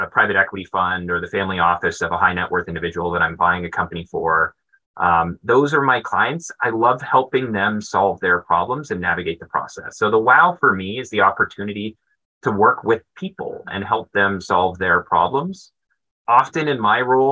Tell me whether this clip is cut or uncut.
uncut